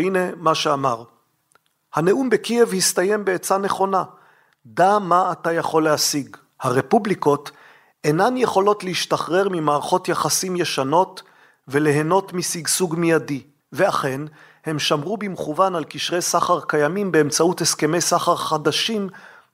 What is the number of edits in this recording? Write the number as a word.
zero